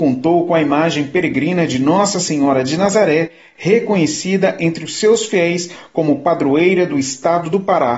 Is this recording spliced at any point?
no; 0 cuts

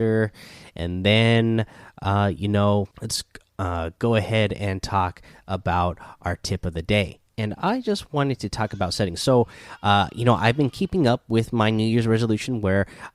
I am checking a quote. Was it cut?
yes; 2 cuts; at 2.9 s, 7.3 s

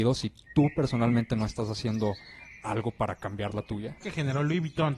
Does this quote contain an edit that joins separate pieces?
yes; 1 cut; at 4.0 s

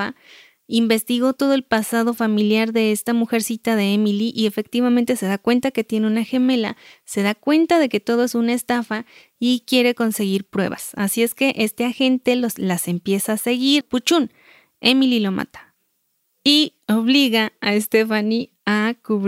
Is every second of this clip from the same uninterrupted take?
no; 1 cut; at 13.8 s

